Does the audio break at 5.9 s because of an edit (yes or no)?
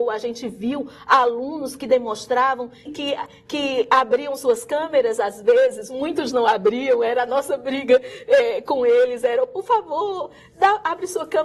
no